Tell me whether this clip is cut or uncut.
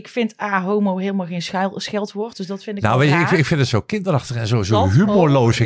uncut